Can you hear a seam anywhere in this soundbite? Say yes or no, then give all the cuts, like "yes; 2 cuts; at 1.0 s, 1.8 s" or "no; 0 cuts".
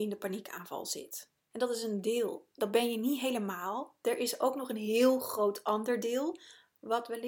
yes; 1 cut; at 1.5 s